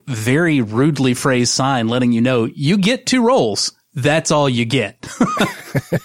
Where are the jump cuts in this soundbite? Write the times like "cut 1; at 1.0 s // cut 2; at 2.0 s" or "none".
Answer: none